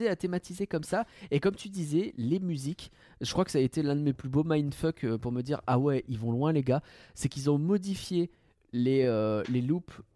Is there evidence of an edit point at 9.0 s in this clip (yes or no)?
no